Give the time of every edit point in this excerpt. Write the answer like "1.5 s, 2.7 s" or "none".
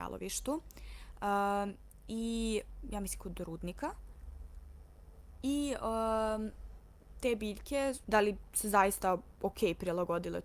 8.0 s